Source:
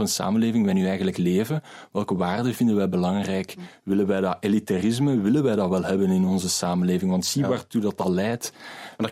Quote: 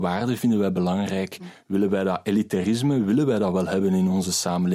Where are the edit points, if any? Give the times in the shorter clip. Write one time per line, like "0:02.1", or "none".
none